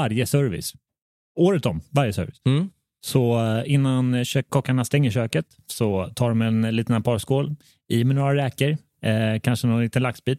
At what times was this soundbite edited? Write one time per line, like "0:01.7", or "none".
0:04.5